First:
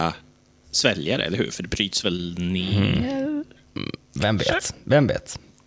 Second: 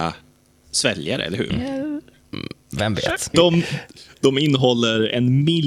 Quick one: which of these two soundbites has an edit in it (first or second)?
second